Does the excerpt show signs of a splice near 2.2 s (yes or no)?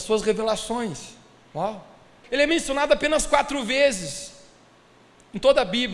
yes